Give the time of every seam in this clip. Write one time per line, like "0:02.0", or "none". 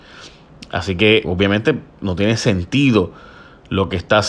0:01.2